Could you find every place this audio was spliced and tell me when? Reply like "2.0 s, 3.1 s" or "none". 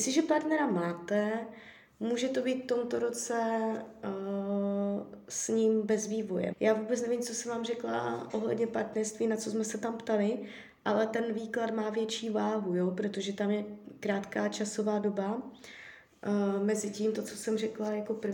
6.5 s, 17.1 s